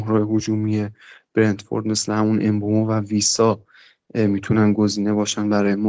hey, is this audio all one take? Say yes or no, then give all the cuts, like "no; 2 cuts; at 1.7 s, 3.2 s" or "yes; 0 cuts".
yes; 0 cuts